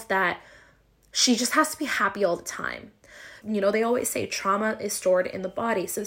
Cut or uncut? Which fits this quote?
cut